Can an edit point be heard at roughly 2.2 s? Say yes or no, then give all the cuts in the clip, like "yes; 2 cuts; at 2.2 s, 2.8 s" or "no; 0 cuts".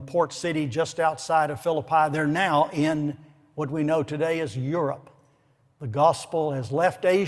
no; 0 cuts